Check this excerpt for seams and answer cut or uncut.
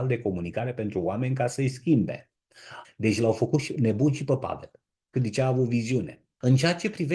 cut